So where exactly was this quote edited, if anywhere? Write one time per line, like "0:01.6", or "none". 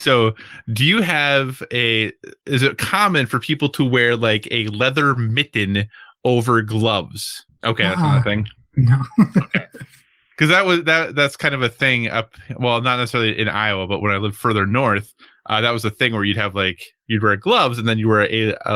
0:07.5

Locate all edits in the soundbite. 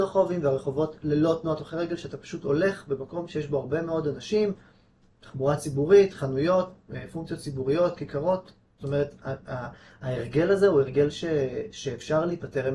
none

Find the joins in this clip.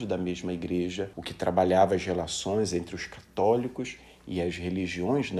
0:01.1

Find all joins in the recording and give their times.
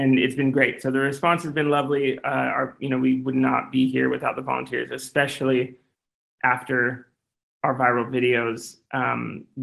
none

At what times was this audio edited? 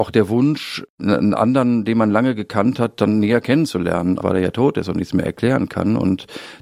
0:04.2

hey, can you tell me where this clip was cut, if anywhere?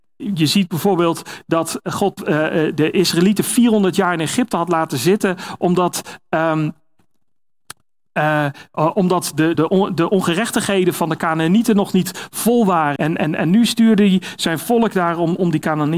0:09.5
0:13.0

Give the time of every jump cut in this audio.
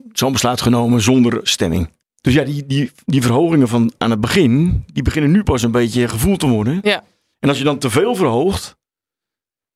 0:02.1

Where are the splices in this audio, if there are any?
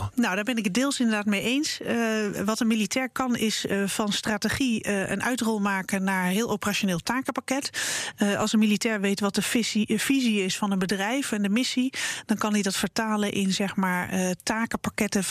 none

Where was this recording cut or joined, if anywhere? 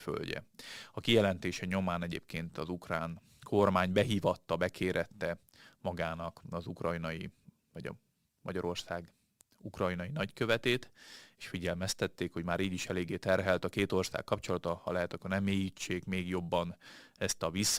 none

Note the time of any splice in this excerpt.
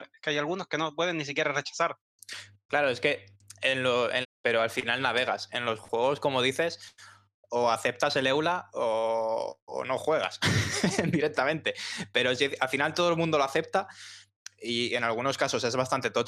0:04.2

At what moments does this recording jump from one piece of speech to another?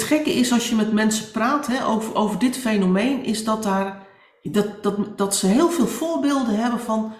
none

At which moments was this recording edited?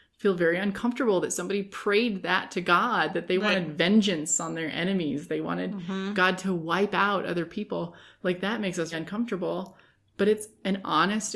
0:08.9

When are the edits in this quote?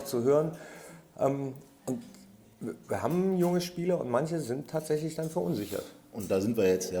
none

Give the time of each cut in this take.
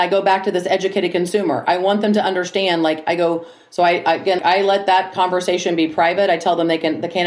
0:04.4

